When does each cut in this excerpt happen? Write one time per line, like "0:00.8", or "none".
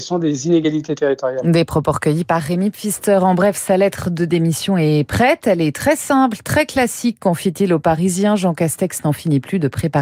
none

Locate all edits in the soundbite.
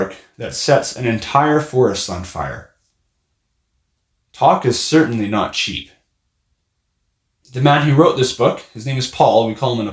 0:07.4

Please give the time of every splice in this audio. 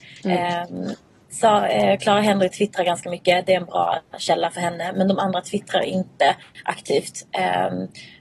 none

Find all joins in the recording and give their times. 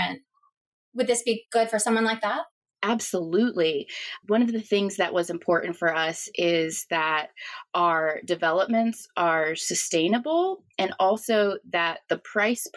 none

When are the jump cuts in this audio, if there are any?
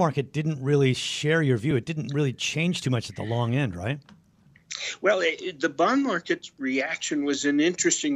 none

